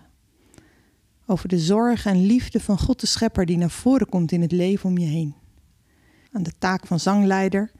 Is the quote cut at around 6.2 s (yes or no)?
yes